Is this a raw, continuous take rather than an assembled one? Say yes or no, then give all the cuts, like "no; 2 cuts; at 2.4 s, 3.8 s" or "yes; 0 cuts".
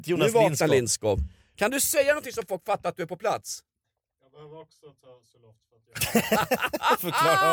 yes; 0 cuts